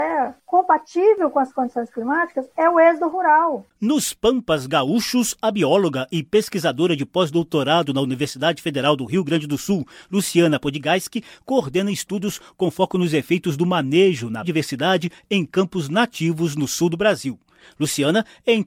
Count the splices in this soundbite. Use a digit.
1